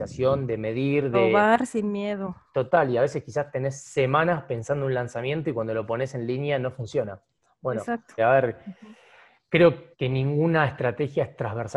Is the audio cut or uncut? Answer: cut